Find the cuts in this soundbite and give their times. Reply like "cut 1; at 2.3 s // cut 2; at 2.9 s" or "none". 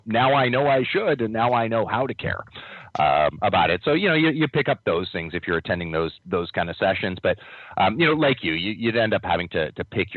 none